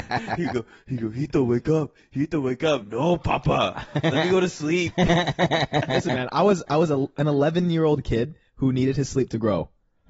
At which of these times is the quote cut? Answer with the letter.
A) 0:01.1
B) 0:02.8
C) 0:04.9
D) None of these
B